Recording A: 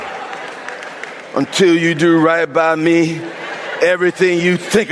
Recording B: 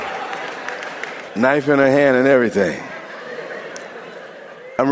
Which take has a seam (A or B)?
B